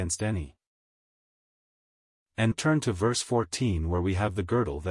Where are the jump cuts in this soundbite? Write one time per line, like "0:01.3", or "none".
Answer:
0:02.5